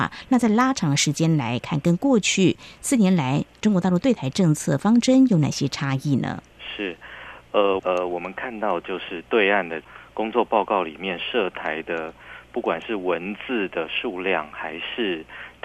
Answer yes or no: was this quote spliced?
yes